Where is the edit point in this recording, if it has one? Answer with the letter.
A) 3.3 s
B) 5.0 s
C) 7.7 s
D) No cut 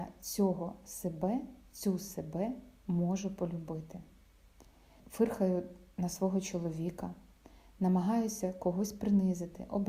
B